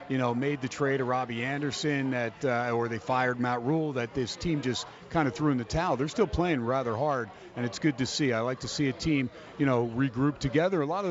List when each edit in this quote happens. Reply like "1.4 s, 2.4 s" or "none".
none